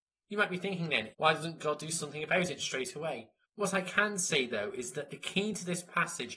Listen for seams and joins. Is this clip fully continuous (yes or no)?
no